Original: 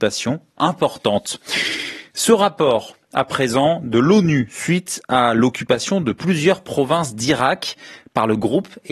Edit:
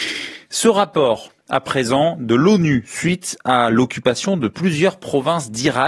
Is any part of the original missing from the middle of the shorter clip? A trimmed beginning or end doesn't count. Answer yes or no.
no